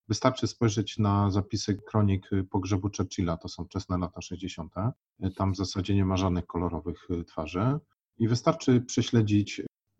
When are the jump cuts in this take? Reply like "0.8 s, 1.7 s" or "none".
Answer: none